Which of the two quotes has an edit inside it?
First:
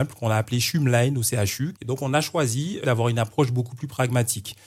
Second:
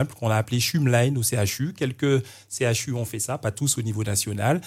first; 2 cuts; at 1.8 s, 2.8 s

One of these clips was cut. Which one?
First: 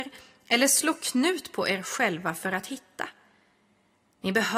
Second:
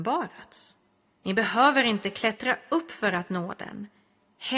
second; 1 cut; at 1.1 s

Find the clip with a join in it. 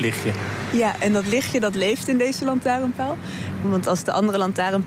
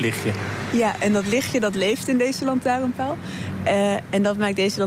first; 1 cut; at 3.6 s

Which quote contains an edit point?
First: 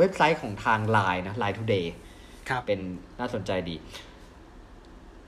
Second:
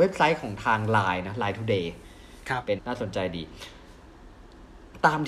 second; 1 cut; at 2.8 s

